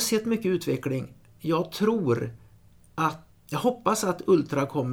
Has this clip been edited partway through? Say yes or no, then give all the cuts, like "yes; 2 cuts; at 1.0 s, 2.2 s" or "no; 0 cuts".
yes; 1 cut; at 3.3 s